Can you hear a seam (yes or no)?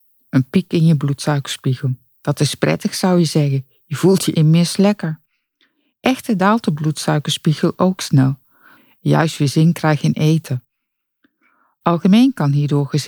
yes